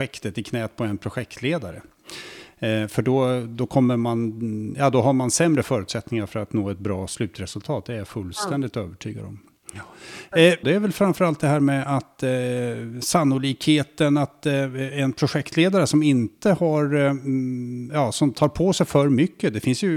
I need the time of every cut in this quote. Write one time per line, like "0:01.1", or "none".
0:10.6